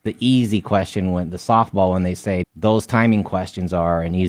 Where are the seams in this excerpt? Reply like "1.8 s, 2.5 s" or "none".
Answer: 2.4 s